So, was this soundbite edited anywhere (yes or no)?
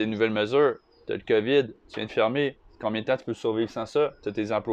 no